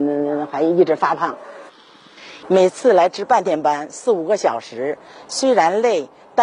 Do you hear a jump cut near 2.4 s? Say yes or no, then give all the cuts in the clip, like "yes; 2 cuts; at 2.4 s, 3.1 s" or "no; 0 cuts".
yes; 1 cut; at 2.4 s